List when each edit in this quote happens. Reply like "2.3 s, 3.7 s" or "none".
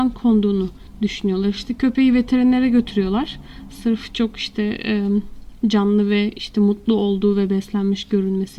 none